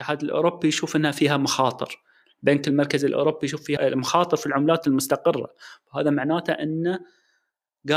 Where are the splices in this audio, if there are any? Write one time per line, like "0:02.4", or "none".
0:03.8